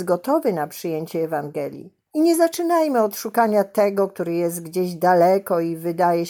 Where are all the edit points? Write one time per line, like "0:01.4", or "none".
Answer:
0:02.1